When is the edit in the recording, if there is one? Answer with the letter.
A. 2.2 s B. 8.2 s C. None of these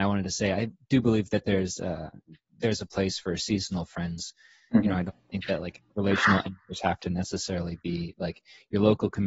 C